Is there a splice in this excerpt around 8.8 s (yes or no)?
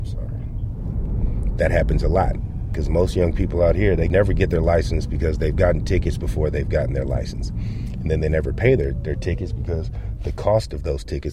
no